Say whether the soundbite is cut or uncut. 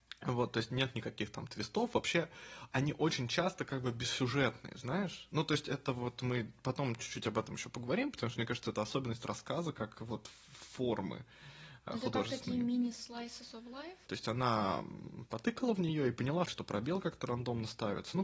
cut